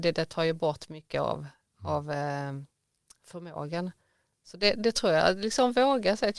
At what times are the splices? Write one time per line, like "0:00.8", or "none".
none

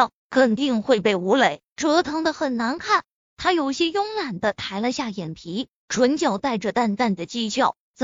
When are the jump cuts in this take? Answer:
0:03.2

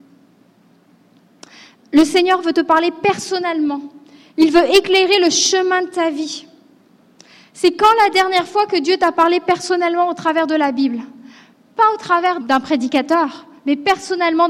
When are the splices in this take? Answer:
0:12.4

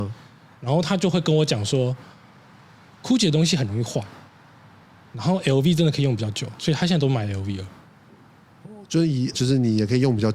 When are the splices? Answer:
0:09.3

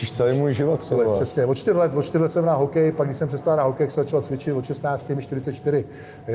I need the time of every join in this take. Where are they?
none

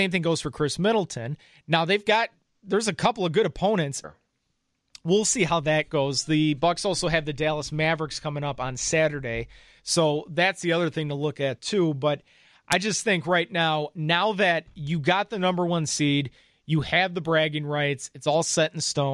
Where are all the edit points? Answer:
0:04.0

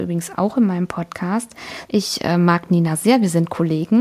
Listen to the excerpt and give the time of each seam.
0:01.8

